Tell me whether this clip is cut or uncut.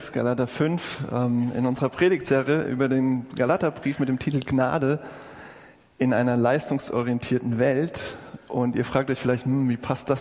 uncut